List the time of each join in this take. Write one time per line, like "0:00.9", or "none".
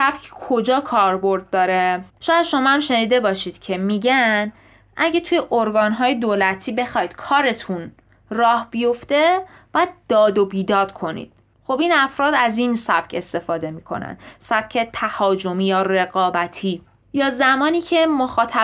0:02.1